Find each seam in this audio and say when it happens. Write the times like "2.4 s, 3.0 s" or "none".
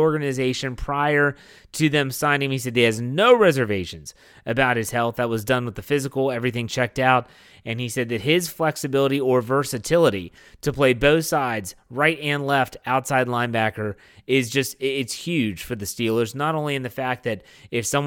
none